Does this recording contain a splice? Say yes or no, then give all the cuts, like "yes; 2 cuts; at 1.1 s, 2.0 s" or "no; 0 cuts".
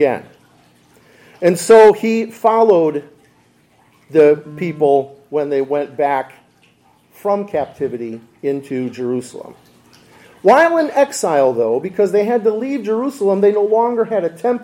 no; 0 cuts